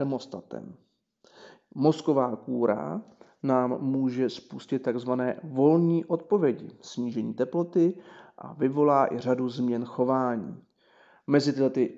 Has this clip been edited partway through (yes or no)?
no